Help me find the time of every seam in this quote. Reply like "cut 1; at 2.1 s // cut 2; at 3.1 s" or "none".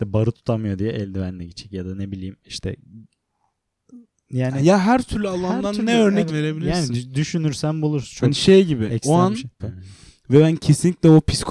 cut 1; at 6.3 s // cut 2; at 9.6 s